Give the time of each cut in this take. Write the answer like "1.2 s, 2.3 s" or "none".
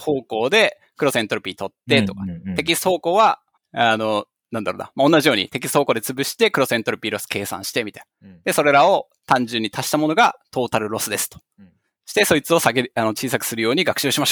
3.6 s